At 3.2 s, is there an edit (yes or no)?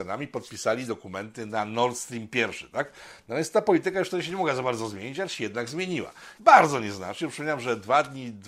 no